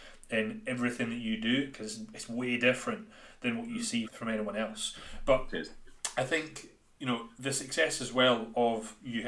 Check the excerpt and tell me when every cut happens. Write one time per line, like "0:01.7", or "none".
0:01.7
0:04.0

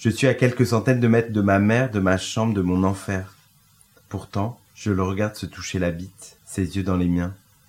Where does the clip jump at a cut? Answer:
0:04.7
0:06.4

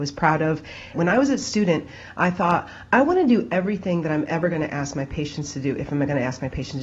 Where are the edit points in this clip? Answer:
0:00.9

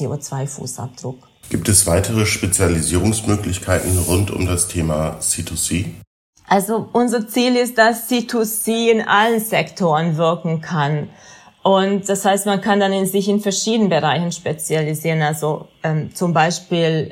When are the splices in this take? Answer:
none

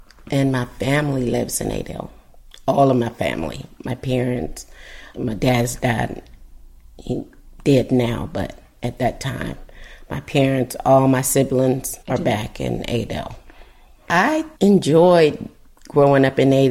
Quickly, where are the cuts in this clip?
0:05.1
0:12.0
0:14.6

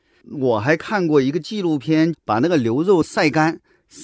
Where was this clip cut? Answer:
0:02.1

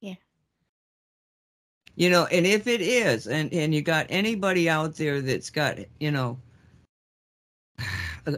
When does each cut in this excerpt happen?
none

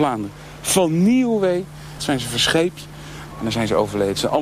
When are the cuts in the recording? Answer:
0:02.0
0:03.3

